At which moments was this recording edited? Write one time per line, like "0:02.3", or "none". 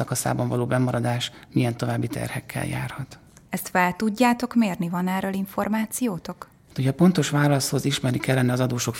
0:03.5